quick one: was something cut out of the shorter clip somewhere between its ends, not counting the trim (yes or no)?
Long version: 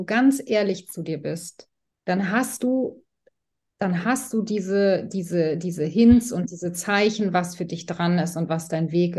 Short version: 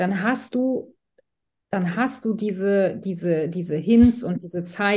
no